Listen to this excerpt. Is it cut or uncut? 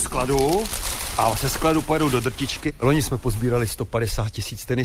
uncut